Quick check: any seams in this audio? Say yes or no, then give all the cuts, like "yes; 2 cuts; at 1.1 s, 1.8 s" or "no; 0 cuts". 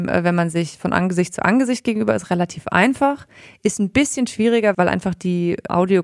yes; 1 cut; at 4.7 s